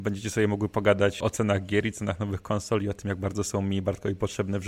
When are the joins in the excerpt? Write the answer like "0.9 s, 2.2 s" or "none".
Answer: 1.2 s